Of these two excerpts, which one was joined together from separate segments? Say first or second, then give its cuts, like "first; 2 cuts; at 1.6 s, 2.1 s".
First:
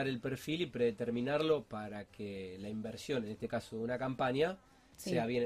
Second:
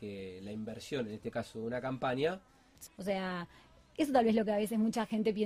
second; 1 cut; at 2.9 s